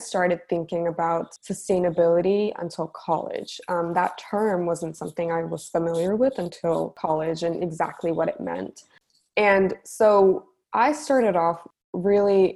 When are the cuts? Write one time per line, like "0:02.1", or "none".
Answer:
none